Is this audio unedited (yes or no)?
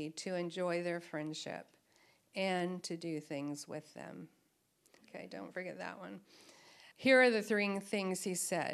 no